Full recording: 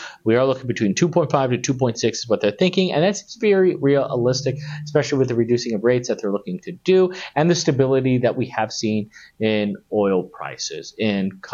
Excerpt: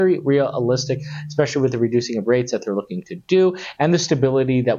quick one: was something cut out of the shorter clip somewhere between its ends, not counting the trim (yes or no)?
no